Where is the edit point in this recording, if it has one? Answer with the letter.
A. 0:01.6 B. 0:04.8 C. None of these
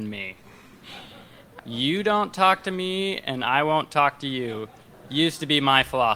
A